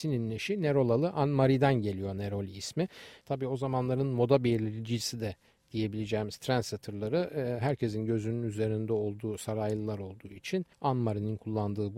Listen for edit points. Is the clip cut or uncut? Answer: cut